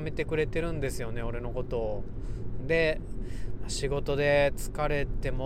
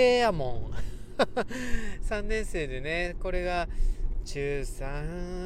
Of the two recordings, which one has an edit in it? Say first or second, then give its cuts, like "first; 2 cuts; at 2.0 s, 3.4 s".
first; 1 cut; at 2.6 s